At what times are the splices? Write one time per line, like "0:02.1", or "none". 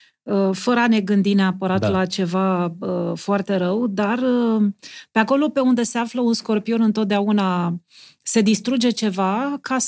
none